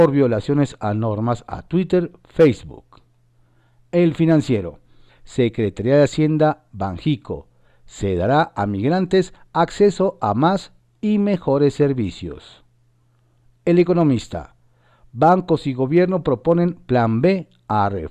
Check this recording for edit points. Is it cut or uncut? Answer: cut